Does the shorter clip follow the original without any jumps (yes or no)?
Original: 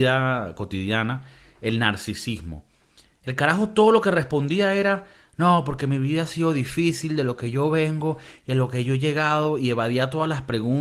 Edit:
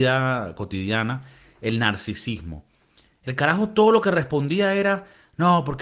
yes